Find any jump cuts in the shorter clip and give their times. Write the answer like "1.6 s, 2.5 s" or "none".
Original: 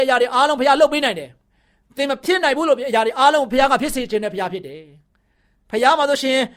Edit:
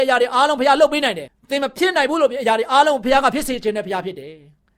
1.3 s